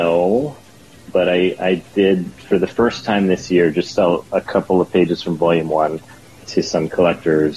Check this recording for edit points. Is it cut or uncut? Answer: cut